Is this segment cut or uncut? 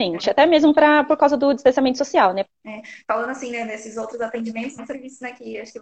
cut